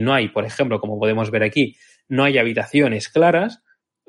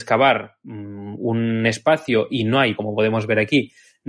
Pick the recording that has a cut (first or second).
second